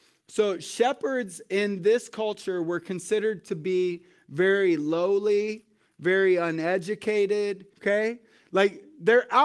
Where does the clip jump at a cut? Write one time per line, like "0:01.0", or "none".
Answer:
0:07.7